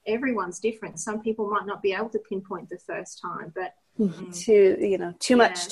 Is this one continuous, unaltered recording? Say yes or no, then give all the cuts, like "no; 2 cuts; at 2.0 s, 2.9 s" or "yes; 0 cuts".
no; 1 cut; at 4.2 s